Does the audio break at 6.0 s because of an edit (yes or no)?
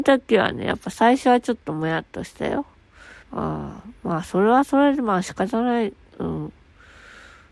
no